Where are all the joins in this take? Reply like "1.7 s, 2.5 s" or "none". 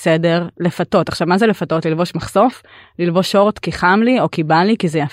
none

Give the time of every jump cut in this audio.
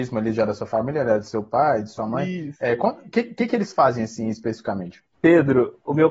5.1 s

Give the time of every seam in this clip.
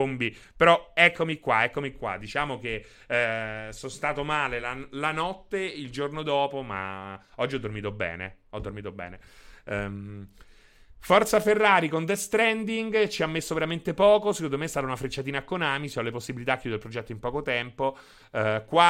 none

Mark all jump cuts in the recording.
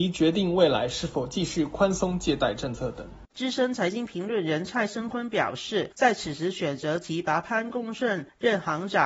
none

